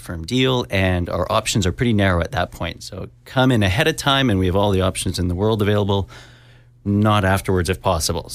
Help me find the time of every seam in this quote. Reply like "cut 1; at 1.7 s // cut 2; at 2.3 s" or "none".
none

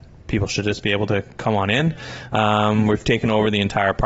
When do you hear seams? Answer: none

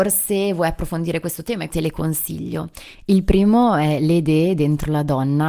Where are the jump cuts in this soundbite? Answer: cut 1; at 1.7 s

